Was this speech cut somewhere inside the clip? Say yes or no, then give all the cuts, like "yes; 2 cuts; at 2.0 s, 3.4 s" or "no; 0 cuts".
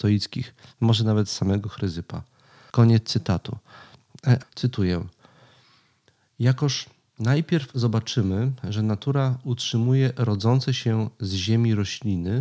yes; 2 cuts; at 2.7 s, 4.4 s